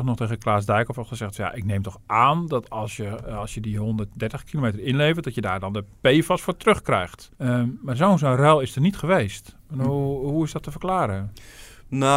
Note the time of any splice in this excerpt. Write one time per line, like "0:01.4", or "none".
0:07.3